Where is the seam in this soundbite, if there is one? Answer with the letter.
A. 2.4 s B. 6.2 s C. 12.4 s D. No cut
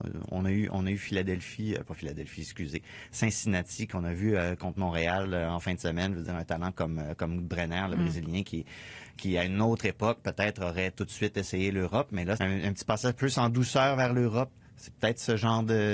C